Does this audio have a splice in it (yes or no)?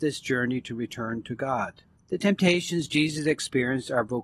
yes